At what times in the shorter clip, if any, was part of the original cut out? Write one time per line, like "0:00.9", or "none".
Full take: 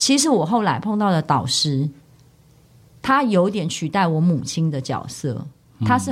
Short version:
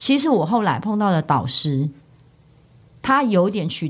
none